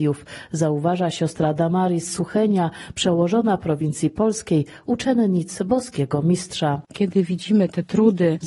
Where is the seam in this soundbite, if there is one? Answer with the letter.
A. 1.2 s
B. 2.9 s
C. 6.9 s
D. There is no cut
D